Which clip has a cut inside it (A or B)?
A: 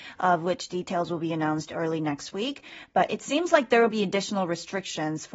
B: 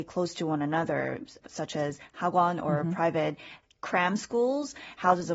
B